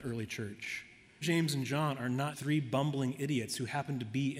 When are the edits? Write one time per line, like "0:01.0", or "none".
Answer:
0:01.2
0:02.3